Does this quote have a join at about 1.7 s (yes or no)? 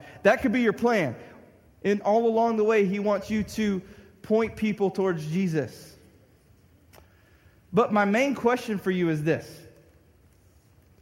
yes